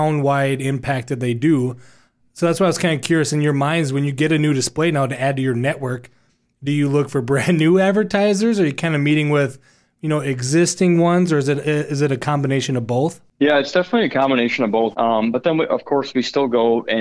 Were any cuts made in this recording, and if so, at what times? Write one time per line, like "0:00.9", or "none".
0:14.9

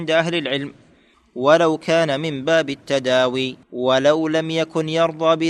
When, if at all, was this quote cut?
0:03.6

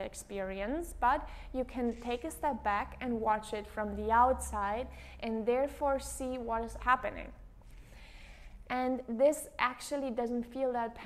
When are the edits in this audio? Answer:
0:06.8
0:08.6

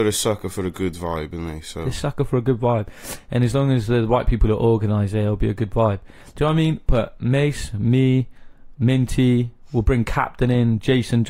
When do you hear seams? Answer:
none

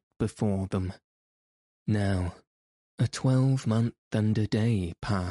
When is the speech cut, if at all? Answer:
0:01.8

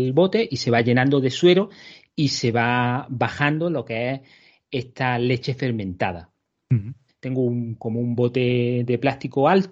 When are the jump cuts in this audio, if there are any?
0:07.1

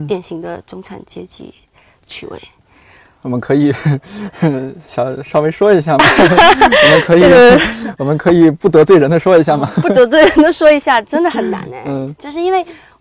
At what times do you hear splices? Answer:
none

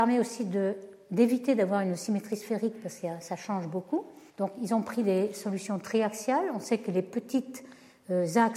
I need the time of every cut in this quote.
0:04.3

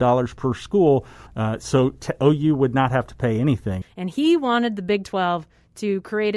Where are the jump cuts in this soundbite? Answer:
0:01.3
0:03.8

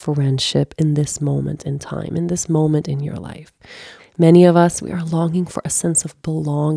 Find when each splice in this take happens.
0:04.0

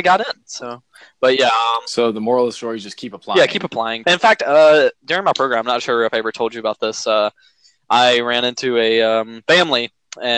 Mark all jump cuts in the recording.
0:04.0

